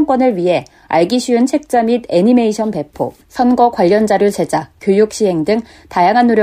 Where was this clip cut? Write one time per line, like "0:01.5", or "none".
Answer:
0:03.2